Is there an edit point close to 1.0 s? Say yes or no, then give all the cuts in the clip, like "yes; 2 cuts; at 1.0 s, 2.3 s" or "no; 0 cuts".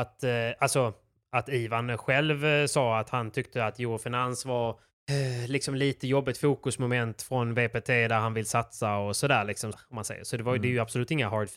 no; 1 cut; at 9.7 s